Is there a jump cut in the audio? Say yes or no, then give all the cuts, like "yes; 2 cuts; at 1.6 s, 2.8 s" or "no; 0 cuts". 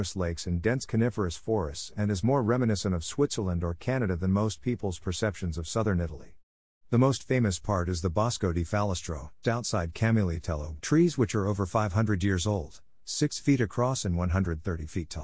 yes; 2 cuts; at 9.4 s, 10.8 s